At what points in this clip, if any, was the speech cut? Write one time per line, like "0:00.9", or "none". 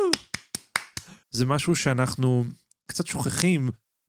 0:01.2